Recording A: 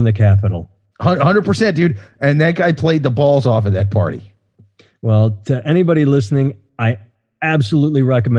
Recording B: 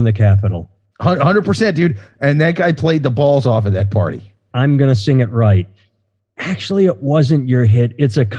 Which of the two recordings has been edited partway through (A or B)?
B